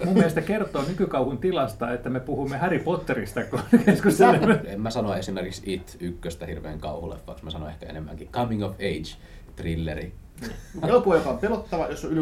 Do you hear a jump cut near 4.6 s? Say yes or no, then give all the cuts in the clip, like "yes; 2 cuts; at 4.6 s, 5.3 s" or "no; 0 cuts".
yes; 2 cuts; at 4.6 s, 10.8 s